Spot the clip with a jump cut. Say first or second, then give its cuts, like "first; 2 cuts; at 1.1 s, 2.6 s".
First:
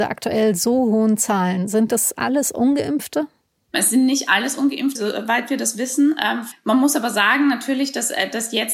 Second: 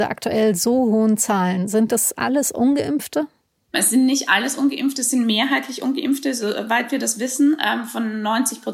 first; 2 cuts; at 5.0 s, 6.5 s